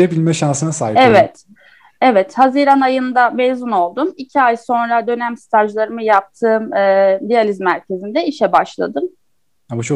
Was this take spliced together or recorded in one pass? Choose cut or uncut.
uncut